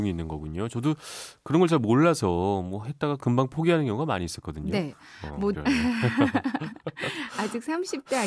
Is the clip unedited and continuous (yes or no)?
no